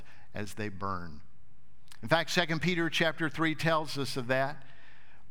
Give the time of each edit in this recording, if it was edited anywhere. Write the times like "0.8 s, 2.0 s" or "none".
2.0 s